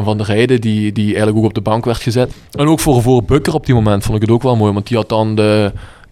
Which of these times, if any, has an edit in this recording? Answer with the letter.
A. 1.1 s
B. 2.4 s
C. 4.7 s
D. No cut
D